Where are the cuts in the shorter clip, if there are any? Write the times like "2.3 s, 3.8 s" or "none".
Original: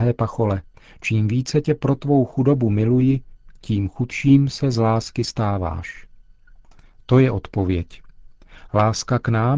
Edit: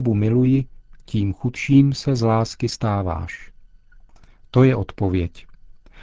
none

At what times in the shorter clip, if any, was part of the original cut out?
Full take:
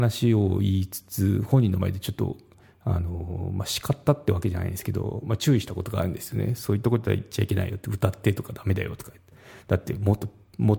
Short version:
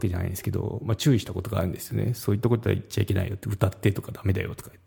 none

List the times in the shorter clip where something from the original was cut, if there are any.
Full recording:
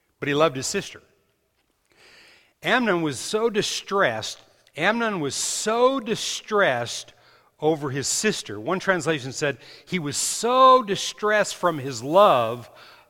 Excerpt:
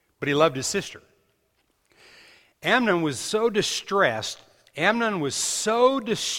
none

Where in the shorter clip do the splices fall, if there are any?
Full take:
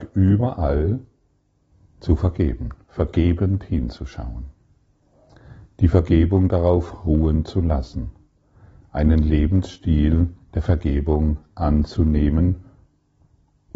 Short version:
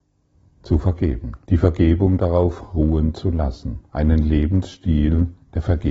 1.4 s, 3.9 s

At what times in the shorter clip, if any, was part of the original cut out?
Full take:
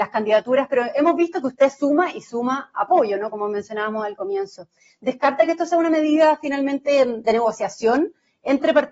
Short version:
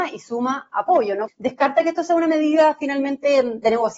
1.3 s

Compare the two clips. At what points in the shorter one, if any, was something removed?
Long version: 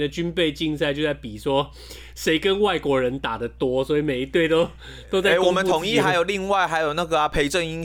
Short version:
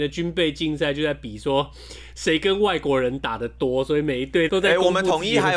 4.5 s

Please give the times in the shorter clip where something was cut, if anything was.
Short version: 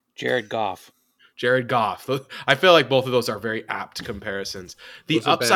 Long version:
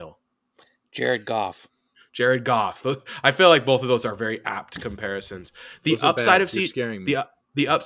none

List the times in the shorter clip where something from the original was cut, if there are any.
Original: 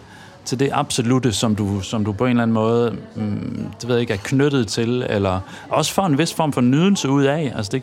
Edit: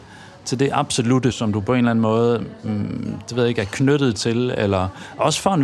1.3 s

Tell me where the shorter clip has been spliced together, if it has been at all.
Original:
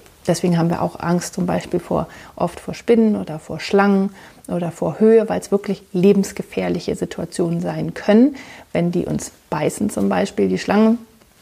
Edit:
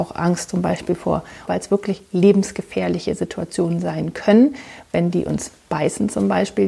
1.5 s

